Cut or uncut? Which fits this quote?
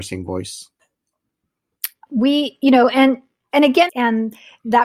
cut